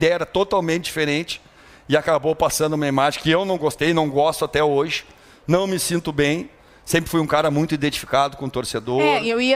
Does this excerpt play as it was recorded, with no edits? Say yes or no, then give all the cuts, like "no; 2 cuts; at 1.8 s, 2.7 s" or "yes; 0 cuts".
yes; 0 cuts